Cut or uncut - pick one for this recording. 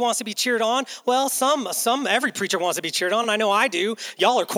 uncut